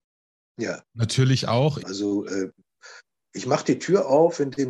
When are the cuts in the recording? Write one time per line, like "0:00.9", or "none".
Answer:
0:01.8